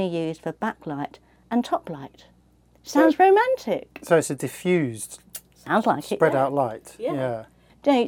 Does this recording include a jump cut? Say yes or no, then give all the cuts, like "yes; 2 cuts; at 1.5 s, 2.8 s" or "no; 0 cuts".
no; 0 cuts